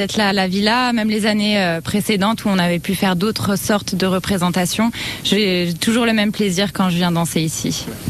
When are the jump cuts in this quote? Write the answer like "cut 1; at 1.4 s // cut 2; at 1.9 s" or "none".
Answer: none